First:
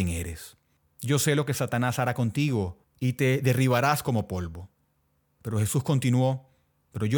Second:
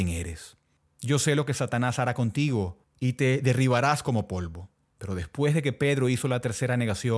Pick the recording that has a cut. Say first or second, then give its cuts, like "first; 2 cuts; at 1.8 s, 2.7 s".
second; 1 cut; at 4.9 s